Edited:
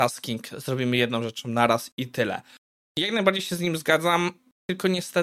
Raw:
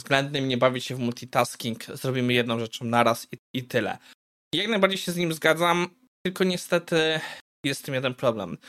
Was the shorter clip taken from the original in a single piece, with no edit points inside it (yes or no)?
no